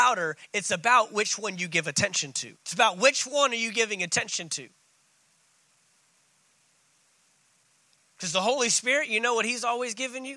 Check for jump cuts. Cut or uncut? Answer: cut